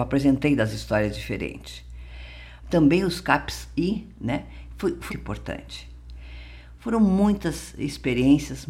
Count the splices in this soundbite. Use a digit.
2